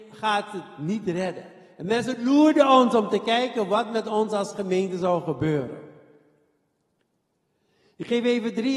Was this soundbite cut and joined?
no; 0 cuts

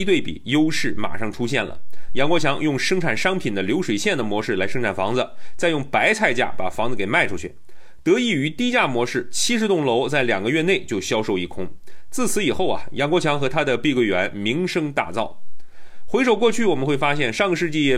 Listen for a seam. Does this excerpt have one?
no; 0 cuts

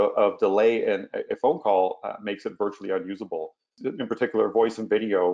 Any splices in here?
yes; 1 cut; at 3.7 s

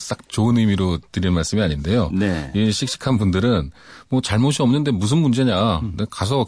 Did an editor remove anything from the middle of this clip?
no; 0 cuts

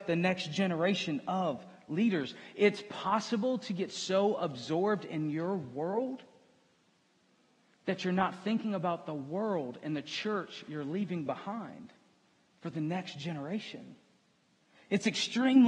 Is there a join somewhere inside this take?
no; 0 cuts

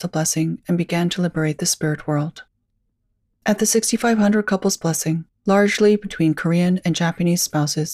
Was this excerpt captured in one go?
no; 1 cut; at 3.3 s

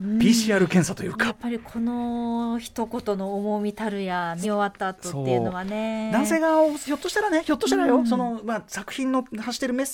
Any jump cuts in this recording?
yes; 2 cuts; at 1.3 s, 4.4 s

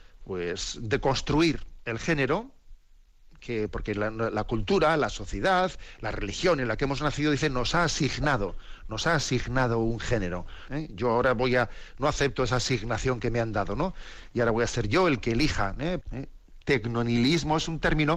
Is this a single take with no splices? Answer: no; 2 cuts; at 10.7 s, 16.0 s

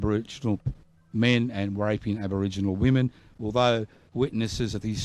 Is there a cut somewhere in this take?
no; 0 cuts

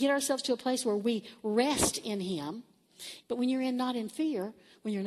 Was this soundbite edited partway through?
yes; 1 cut; at 3.2 s

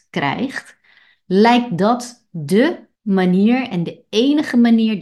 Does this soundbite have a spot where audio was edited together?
yes; 1 cut; at 2.9 s

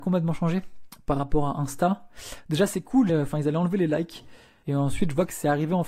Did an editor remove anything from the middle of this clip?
yes; 2 cuts; at 3.1 s, 4.6 s

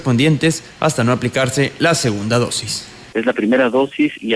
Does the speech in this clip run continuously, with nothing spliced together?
no; 1 cut; at 3.1 s

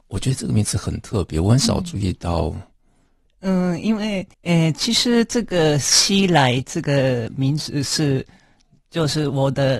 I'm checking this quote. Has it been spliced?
yes; 2 cuts; at 3.3 s, 4.3 s

